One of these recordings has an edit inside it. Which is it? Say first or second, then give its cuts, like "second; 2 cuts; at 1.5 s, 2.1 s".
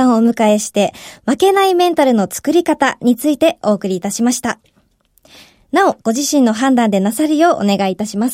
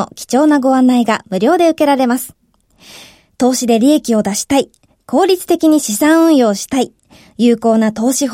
first; 1 cut; at 6.0 s